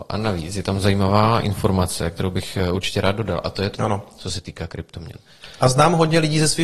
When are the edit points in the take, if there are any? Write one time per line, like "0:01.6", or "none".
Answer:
0:03.8